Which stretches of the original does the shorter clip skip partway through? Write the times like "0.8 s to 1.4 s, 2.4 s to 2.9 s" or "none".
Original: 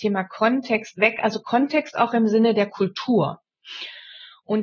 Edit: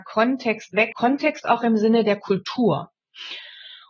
1.2 s to 1.4 s